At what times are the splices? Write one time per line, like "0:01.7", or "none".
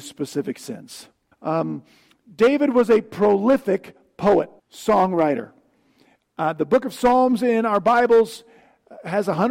0:01.3
0:04.6